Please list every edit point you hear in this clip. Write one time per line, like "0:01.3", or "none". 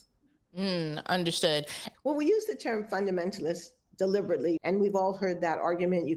0:01.9
0:04.6